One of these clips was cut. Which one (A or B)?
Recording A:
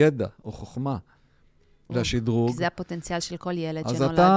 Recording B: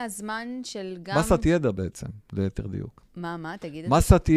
A